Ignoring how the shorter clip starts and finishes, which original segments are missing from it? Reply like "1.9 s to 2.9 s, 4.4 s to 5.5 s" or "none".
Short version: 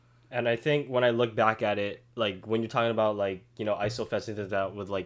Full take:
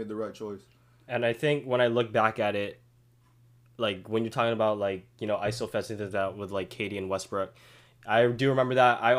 2.9 s to 3.7 s